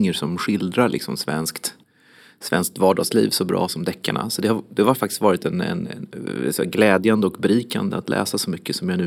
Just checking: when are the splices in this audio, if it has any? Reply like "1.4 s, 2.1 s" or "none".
none